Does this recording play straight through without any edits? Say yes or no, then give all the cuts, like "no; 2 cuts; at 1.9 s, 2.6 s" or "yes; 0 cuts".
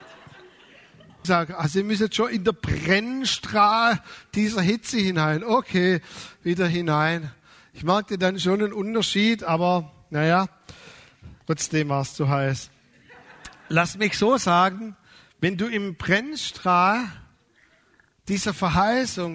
no; 2 cuts; at 1.2 s, 11.4 s